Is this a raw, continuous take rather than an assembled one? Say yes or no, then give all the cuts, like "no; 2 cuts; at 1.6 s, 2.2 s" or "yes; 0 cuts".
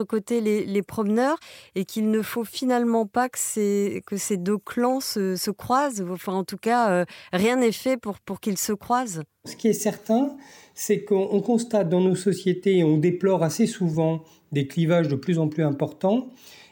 yes; 0 cuts